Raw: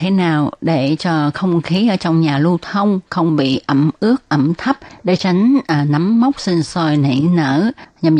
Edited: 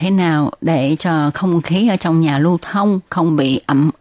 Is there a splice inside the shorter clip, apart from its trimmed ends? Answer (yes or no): no